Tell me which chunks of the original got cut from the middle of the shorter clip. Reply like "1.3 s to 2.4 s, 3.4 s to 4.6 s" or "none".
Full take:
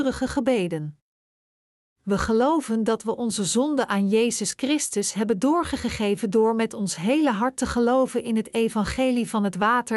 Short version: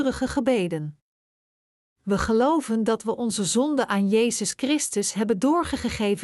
none